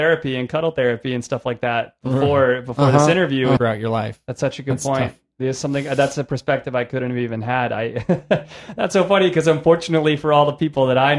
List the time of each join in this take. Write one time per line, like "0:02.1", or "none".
0:03.6